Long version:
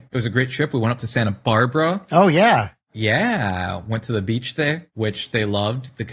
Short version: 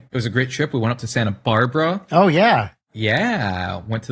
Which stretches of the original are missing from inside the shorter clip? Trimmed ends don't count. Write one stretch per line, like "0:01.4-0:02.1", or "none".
none